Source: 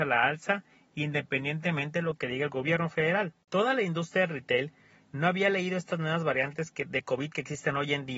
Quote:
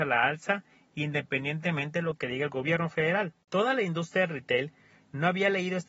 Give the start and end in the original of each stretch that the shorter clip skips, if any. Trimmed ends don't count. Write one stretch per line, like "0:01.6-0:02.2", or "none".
none